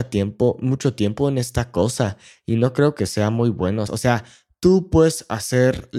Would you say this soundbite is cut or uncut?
cut